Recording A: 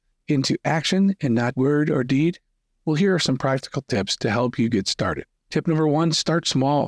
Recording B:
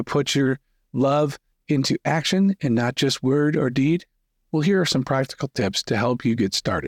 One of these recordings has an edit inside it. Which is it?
A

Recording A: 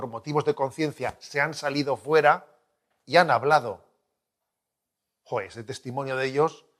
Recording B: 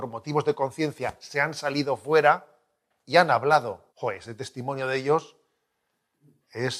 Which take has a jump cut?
B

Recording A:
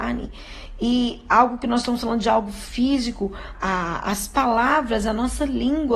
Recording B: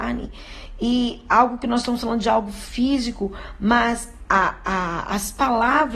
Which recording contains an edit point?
A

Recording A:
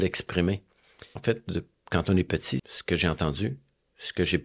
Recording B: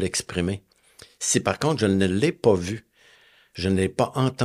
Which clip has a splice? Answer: A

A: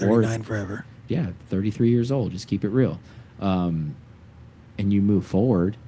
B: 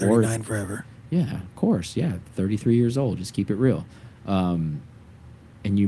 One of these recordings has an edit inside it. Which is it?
A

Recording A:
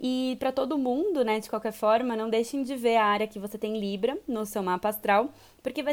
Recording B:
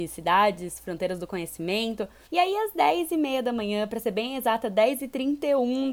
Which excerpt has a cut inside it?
B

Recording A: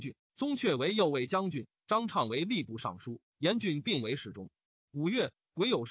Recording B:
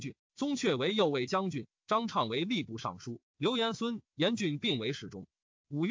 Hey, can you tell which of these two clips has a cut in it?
A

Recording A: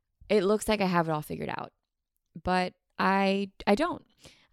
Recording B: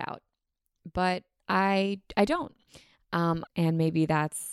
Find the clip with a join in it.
B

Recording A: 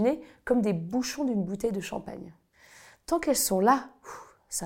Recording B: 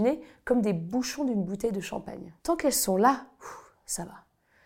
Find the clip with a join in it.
B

